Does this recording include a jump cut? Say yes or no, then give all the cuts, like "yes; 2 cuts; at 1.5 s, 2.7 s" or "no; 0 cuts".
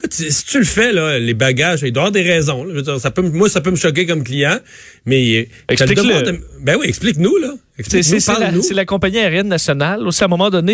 no; 0 cuts